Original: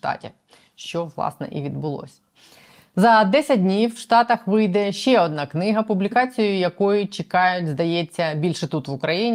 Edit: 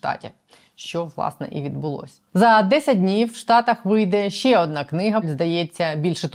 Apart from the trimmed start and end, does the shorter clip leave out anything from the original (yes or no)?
yes